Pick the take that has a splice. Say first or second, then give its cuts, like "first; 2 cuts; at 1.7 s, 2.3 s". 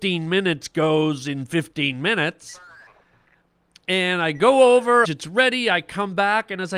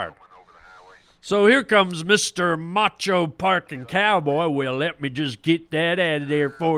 first; 1 cut; at 5.0 s